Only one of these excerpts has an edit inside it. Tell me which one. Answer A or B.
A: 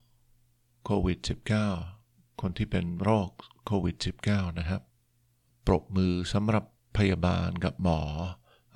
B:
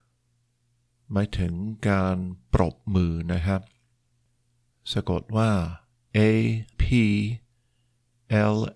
B